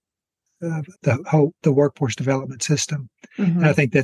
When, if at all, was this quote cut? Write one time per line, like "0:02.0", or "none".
0:00.9

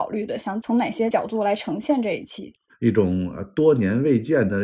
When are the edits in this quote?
0:02.7

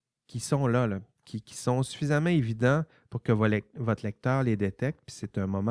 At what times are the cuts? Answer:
none

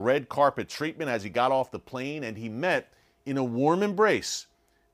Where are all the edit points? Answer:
none

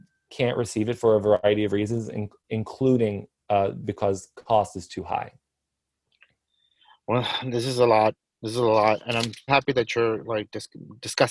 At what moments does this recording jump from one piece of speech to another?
0:09.5

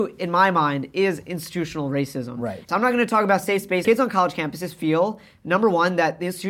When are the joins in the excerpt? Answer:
0:02.7
0:03.8

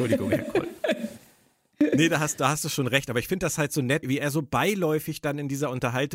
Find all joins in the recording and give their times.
0:04.0

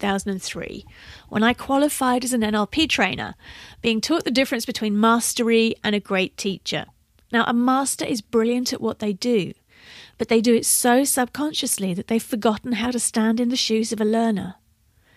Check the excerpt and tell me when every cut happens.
none

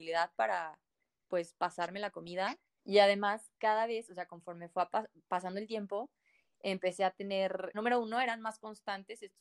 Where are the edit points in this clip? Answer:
0:02.8
0:07.7

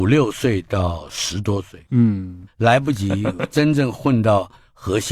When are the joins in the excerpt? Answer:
0:02.5

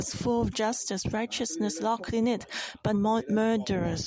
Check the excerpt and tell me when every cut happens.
0:02.9

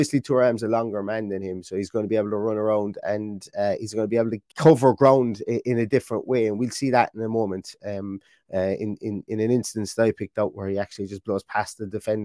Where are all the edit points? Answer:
0:04.5

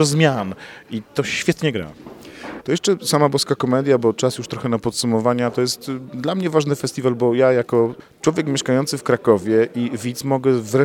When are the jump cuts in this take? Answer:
0:02.6

